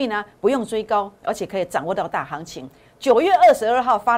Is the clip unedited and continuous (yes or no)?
yes